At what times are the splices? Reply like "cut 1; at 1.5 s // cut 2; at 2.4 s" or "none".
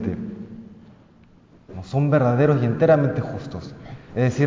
cut 1; at 1.7 s